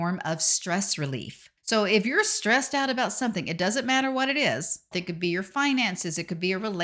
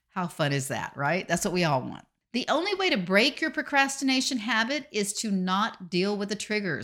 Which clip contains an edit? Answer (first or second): first